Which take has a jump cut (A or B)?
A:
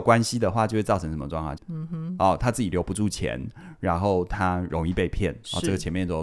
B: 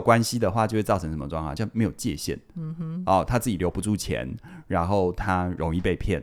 A